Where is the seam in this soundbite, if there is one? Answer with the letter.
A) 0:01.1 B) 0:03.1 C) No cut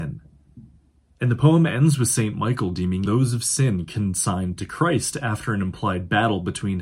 B